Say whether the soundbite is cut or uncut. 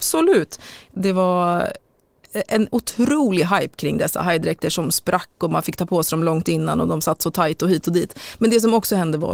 uncut